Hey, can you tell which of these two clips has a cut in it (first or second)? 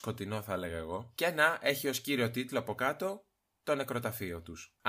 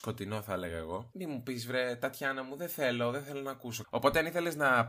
second